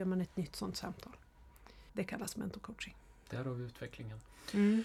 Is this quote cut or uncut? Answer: cut